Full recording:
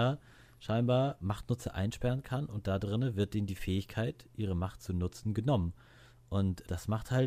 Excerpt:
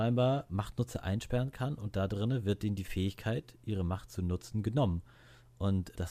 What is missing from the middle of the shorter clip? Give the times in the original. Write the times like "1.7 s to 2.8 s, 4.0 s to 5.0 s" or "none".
none